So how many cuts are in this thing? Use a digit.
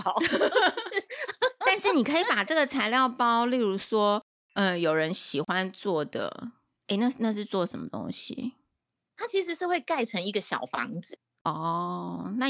0